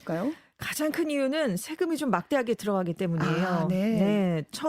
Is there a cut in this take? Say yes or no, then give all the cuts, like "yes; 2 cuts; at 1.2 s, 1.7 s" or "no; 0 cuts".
no; 0 cuts